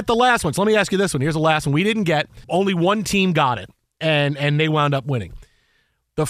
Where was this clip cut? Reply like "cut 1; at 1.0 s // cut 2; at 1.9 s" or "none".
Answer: cut 1; at 2.4 s